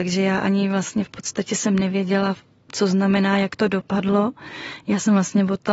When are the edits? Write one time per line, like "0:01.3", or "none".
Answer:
none